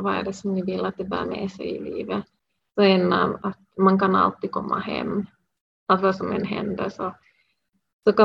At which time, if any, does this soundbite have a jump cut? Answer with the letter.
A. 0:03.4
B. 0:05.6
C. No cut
A